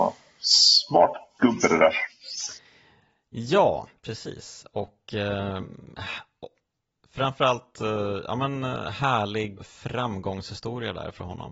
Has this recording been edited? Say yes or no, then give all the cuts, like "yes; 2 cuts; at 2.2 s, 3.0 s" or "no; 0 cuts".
yes; 1 cut; at 9.6 s